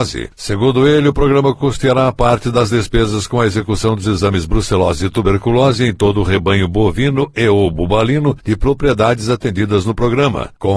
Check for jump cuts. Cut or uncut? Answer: uncut